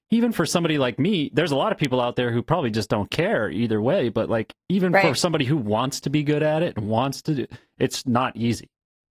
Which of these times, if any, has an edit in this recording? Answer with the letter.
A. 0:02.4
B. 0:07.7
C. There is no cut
C